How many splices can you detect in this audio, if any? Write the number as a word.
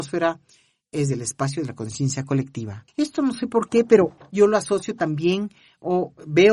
two